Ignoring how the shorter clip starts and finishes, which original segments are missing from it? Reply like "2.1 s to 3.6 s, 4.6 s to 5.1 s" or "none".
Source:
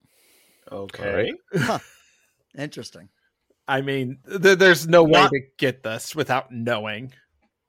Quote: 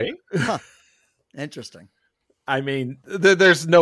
none